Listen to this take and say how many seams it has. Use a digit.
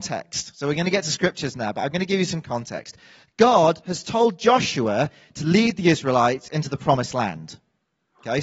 0